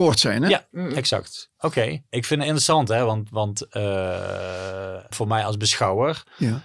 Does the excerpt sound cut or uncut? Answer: cut